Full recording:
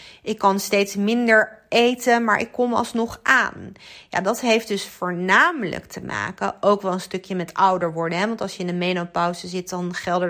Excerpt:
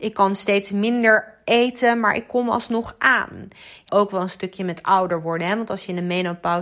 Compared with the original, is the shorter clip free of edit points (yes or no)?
no